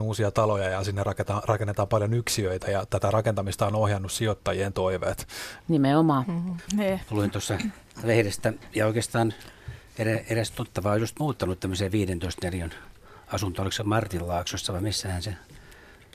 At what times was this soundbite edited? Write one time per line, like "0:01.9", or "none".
0:05.6
0:06.7